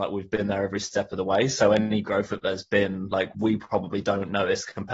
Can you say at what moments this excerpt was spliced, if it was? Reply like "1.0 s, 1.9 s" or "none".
3.3 s